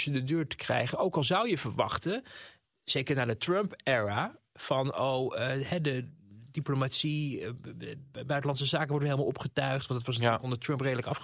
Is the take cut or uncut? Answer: uncut